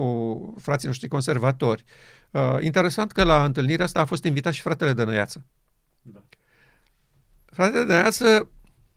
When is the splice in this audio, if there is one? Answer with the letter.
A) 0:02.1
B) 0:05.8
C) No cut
C